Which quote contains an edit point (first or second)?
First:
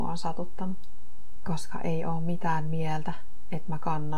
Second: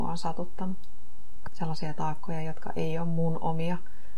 second